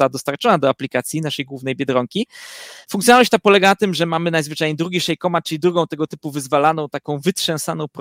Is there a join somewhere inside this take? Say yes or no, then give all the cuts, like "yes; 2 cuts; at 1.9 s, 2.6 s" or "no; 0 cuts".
no; 0 cuts